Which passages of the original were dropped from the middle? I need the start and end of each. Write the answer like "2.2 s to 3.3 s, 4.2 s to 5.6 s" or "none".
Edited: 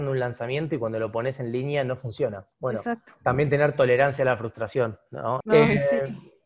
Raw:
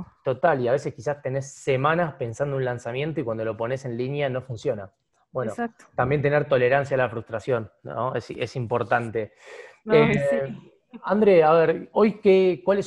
5.0 s to 5.2 s, 8.1 s to 9.8 s